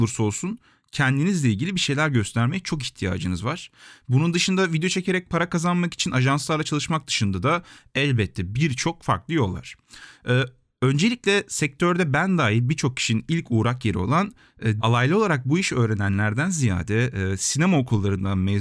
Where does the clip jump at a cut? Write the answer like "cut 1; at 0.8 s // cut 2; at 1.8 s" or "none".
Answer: cut 1; at 14.8 s